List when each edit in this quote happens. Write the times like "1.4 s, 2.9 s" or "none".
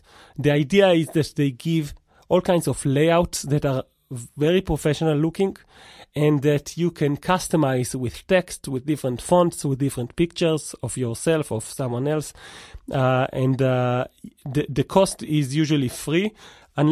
none